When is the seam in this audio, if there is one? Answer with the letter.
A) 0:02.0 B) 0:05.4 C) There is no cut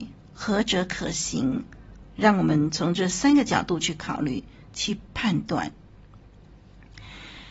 A